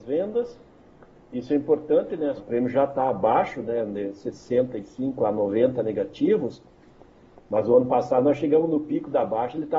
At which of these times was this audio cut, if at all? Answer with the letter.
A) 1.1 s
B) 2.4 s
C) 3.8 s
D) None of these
B